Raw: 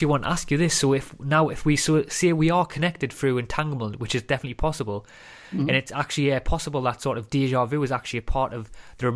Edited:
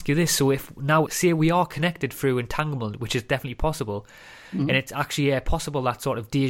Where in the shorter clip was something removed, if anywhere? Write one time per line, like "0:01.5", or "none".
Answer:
0:01.1